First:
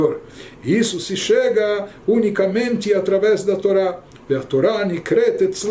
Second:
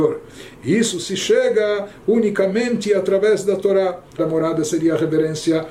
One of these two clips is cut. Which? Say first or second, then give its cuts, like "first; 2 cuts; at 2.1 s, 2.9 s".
second; 1 cut; at 4.2 s